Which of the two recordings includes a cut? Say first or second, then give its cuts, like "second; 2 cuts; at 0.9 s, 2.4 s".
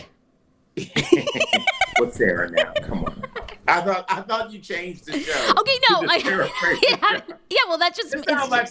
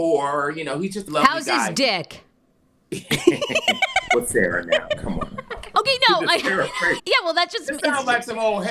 second; 3 cuts; at 1.1 s, 5.7 s, 7.0 s